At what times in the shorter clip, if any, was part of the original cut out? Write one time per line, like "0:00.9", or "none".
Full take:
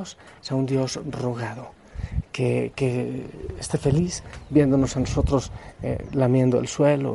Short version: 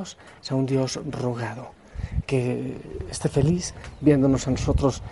0:02.3